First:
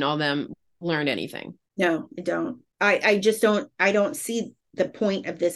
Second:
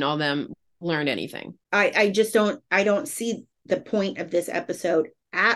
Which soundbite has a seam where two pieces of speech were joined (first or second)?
second